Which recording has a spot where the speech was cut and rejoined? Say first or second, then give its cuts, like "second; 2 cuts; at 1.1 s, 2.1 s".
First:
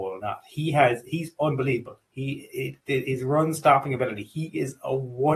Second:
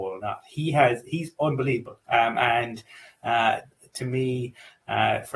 second; 1 cut; at 2.0 s